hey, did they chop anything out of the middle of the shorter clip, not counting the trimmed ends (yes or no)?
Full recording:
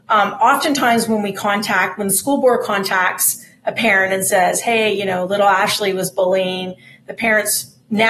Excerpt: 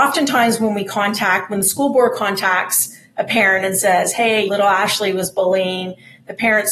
yes